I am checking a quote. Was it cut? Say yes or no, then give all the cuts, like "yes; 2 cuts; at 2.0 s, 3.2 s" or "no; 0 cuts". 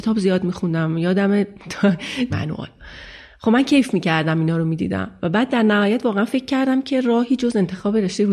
yes; 1 cut; at 2.3 s